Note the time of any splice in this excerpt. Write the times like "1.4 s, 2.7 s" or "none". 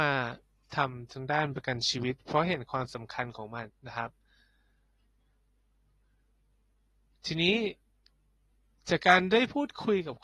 3.7 s